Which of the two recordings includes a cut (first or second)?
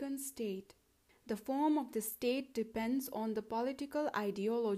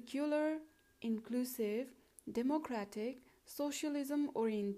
first